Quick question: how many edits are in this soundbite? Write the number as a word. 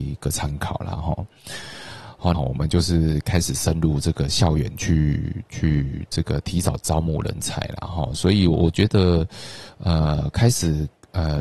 one